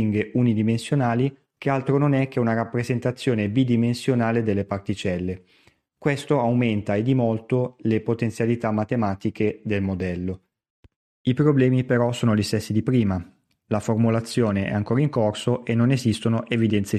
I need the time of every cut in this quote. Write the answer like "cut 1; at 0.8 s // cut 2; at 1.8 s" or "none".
cut 1; at 1.6 s